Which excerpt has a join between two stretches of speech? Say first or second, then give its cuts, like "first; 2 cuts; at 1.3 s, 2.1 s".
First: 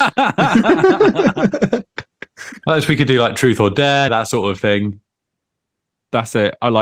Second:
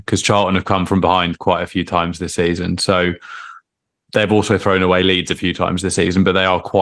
first; 1 cut; at 4.1 s